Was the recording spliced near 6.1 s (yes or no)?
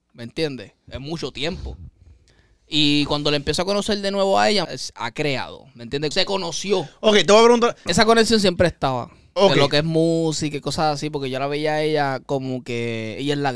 yes